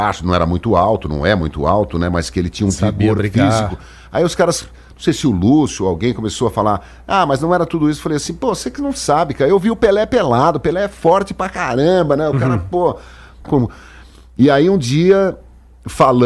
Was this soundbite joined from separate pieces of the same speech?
yes; 1 cut; at 13.4 s

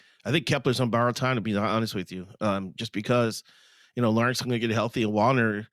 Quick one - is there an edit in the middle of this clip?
no; 0 cuts

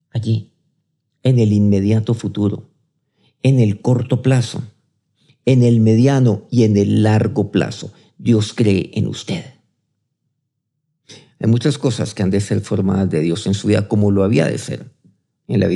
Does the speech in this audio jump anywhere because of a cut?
no; 0 cuts

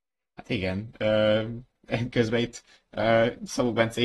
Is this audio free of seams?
yes; 0 cuts

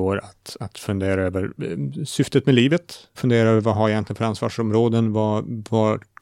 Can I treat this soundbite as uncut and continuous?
no; 1 cut; at 3.2 s

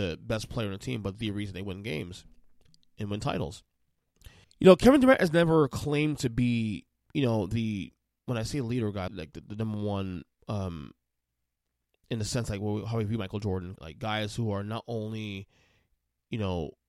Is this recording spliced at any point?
yes; 3 cuts; at 4.4 s, 9.1 s, 13.8 s

